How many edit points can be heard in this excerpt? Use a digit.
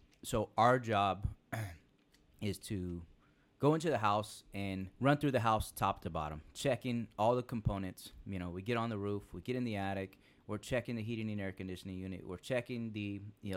1